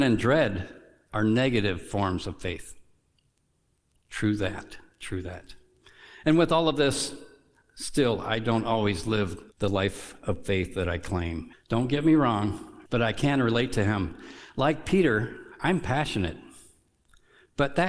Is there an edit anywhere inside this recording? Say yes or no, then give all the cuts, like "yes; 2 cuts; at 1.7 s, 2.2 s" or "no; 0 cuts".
yes; 3 cuts; at 9.5 s, 11.5 s, 12.9 s